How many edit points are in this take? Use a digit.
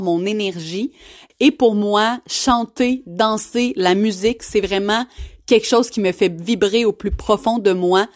1